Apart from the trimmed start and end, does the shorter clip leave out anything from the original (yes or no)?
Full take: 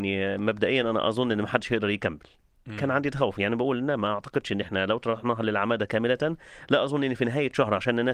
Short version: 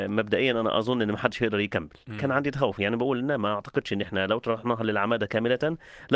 yes